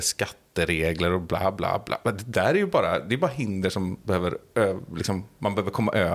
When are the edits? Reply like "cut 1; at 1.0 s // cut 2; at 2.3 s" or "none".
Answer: none